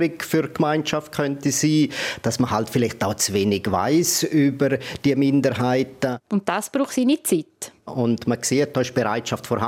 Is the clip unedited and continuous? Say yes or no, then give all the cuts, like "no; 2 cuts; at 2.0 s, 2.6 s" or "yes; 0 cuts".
no; 2 cuts; at 6.2 s, 7.9 s